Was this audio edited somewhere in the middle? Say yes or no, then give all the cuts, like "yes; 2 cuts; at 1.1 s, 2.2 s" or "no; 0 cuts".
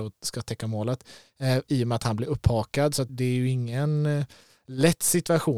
yes; 1 cut; at 3.1 s